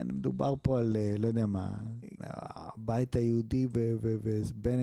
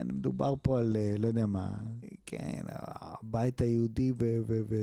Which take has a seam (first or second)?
first